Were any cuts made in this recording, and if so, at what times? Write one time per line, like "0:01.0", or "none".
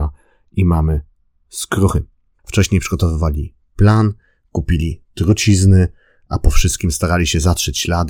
0:02.4